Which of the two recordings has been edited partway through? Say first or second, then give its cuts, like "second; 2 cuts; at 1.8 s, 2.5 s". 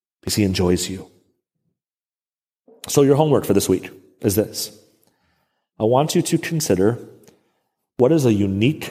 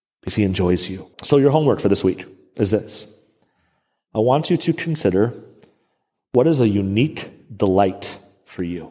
second; 1 cut; at 1.1 s